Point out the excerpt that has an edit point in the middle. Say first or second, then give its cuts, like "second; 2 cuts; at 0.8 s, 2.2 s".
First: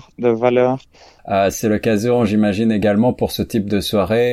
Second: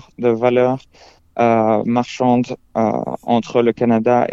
first; 1 cut; at 1.2 s